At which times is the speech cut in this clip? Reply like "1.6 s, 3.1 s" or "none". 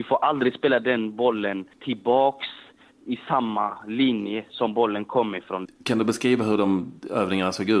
1.7 s, 5.7 s